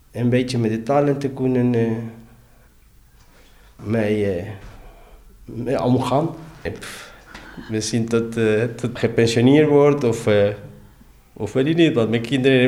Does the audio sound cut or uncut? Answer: cut